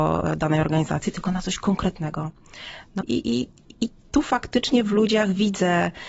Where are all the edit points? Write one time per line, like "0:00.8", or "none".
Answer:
0:03.0